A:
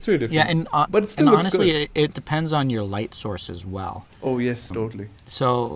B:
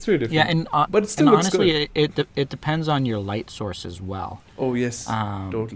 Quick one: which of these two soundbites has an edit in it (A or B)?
A